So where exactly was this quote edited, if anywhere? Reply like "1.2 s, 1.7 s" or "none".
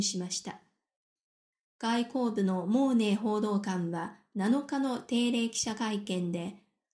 1.7 s